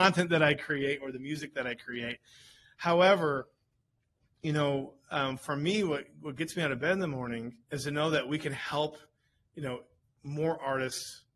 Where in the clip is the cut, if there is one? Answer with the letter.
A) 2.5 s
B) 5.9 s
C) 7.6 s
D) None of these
C